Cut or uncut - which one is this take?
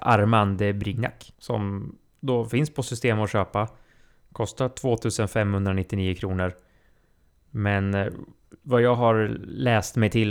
uncut